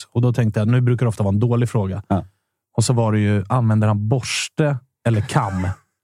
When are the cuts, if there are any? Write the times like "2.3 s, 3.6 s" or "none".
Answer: none